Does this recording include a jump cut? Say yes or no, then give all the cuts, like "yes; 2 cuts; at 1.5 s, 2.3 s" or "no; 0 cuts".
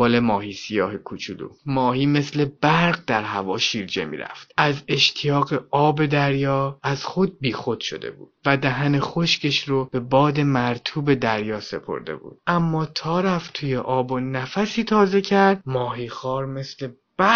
yes; 1 cut; at 8.4 s